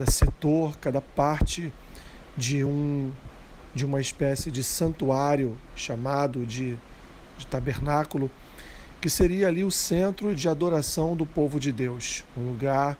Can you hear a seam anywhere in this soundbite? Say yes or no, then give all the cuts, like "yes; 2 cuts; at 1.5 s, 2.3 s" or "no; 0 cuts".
no; 0 cuts